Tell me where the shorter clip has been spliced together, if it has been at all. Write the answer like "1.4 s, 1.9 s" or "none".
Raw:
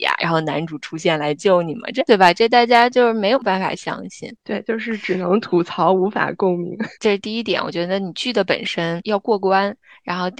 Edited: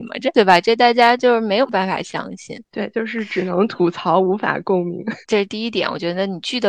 none